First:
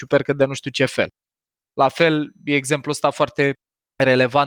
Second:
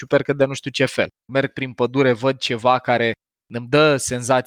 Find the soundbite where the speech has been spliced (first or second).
second